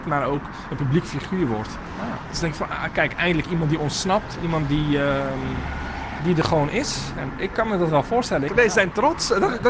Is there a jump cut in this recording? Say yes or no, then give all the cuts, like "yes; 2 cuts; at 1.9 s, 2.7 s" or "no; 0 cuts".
yes; 3 cuts; at 6.2 s, 7.3 s, 8.5 s